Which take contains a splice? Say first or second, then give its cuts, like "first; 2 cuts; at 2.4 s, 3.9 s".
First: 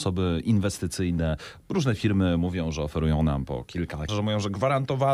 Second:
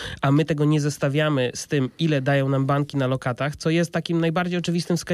first; 1 cut; at 4.1 s